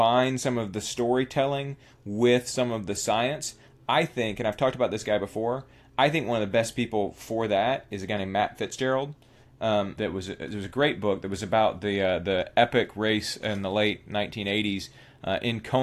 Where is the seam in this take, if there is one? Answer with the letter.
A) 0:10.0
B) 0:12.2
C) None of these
A